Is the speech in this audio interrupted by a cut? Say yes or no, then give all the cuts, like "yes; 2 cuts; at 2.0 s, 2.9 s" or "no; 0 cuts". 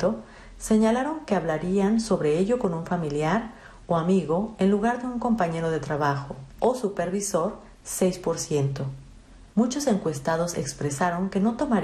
yes; 2 cuts; at 6.6 s, 9.5 s